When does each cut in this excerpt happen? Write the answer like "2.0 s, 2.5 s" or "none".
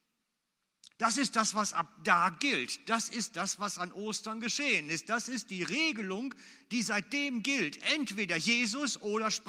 none